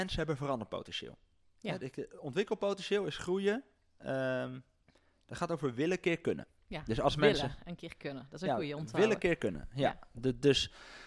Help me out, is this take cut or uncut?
uncut